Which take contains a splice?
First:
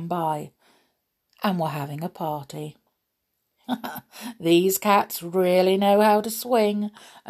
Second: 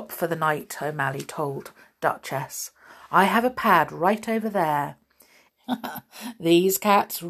second; 1 cut; at 5.5 s

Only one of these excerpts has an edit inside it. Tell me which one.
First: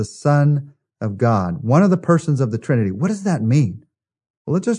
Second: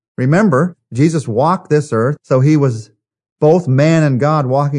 second; 1 cut; at 2.2 s

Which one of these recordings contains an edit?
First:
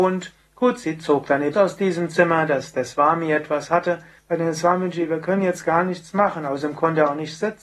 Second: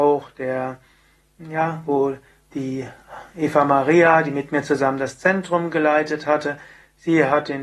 first; 2 cuts; at 1.5 s, 4.2 s

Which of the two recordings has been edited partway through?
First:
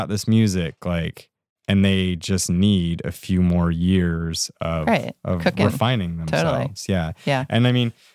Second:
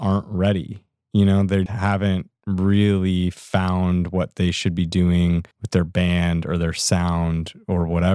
second; 2 cuts; at 1.7 s, 5.5 s

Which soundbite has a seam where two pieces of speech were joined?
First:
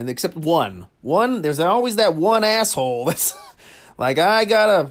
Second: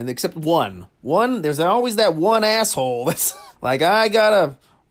second; 1 cut; at 3.6 s

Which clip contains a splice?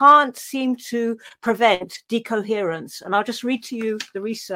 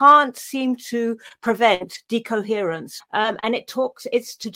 second; 1 cut; at 3.0 s

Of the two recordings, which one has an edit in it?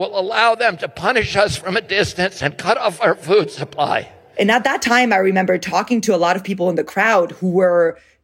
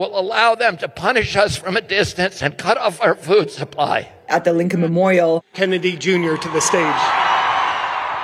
second; 2 cuts; at 4.3 s, 5.5 s

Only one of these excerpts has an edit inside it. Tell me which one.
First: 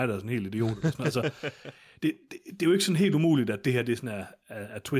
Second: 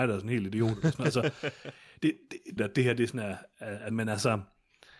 second; 2 cuts; at 2.6 s, 3.9 s

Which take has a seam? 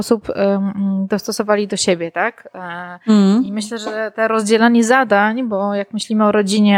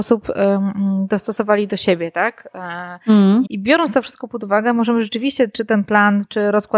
second; 1 cut; at 3.5 s

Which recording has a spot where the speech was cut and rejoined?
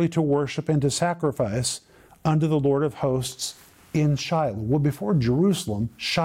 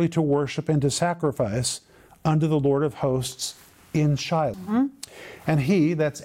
second; 1 cut; at 4.5 s

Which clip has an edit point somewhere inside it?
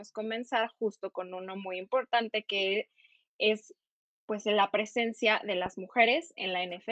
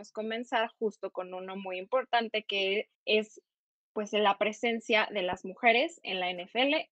second; 1 cut; at 2.9 s

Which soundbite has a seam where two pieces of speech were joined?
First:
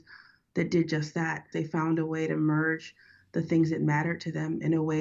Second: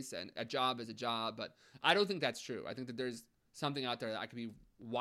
first; 1 cut; at 1.5 s

